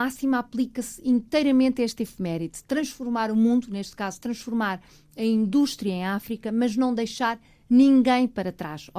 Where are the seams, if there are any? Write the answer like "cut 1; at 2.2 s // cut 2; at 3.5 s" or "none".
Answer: none